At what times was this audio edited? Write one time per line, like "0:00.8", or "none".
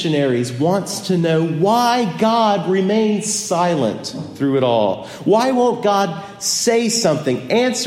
none

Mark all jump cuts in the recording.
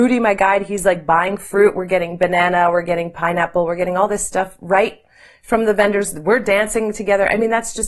none

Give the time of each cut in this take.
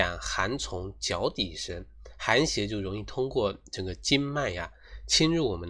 none

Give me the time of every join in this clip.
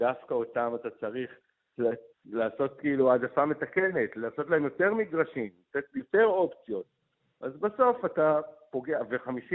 none

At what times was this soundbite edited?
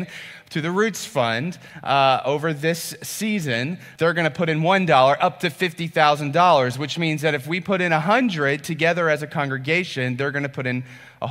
0:04.0

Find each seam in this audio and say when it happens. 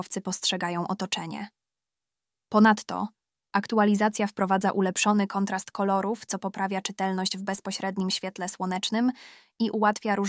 none

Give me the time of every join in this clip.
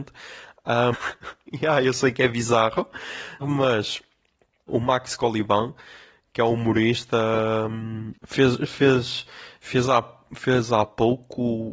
0:00.9
0:03.4

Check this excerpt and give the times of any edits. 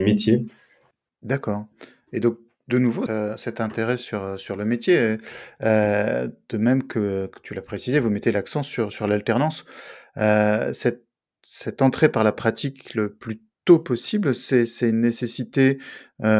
0:03.1

